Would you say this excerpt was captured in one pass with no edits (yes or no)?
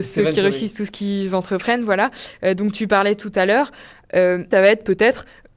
no